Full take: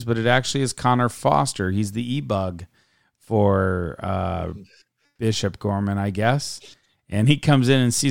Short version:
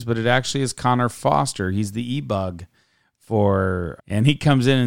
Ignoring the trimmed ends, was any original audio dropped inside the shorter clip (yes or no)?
yes